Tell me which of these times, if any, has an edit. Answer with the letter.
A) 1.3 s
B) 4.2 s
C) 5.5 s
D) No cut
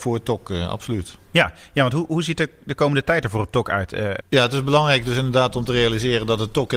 B